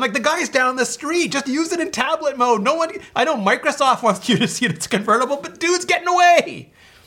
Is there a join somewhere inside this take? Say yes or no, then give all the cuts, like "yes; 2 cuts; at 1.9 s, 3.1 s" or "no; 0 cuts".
no; 0 cuts